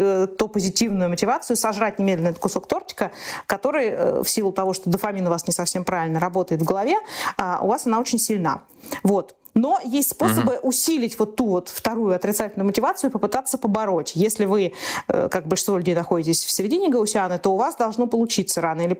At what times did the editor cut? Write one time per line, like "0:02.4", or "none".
none